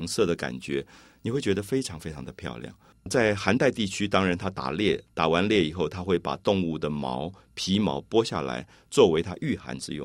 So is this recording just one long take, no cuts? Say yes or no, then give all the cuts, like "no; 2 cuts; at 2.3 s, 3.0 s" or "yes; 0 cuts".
no; 1 cut; at 2.9 s